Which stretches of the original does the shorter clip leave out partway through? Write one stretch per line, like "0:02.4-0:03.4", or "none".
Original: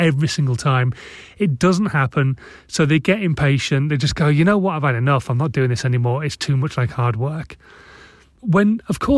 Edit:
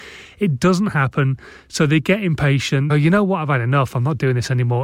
0:03.9-0:04.2